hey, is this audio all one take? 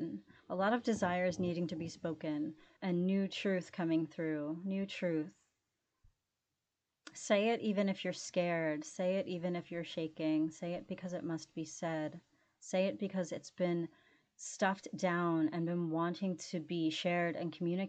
no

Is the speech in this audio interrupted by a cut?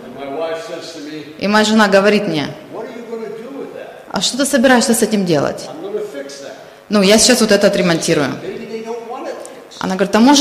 no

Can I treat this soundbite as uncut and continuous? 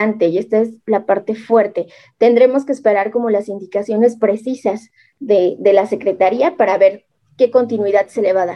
yes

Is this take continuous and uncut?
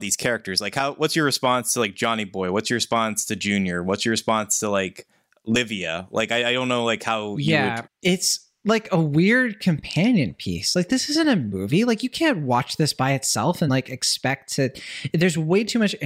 no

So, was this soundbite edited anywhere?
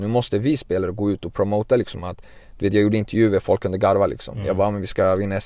no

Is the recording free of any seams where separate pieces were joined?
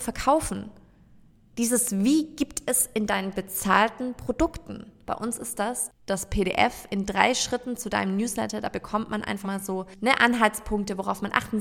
no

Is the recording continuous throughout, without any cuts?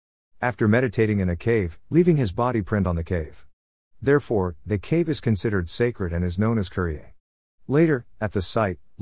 no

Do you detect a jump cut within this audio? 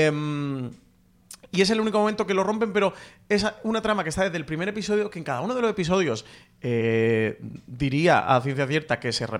no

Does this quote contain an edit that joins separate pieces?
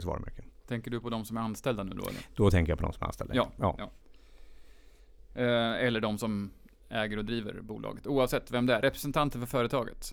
no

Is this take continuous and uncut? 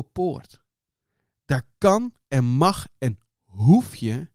yes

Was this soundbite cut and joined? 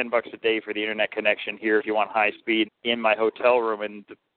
yes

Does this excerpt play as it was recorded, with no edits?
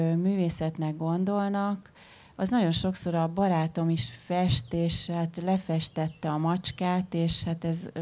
yes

